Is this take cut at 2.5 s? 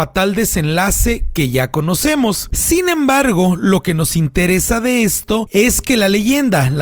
yes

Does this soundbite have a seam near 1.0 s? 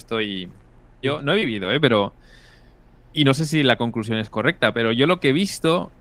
yes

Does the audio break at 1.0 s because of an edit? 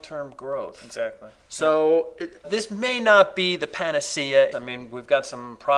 no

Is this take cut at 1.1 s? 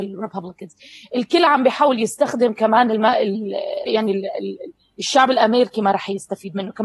no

